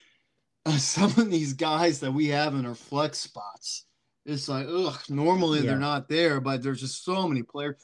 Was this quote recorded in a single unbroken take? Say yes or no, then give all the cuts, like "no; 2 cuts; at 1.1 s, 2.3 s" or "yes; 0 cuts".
no; 1 cut; at 4.5 s